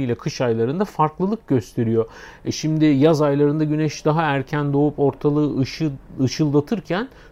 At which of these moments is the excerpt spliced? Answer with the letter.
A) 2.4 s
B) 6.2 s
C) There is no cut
C